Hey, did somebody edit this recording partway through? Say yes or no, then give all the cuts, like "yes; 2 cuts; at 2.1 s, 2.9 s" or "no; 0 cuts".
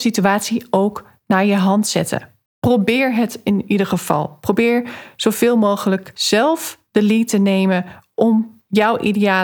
no; 0 cuts